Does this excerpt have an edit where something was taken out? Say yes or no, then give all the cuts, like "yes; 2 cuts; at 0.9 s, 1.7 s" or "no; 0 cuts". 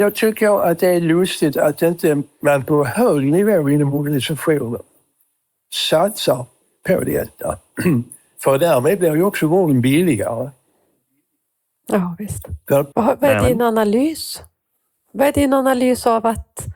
yes; 1 cut; at 12.9 s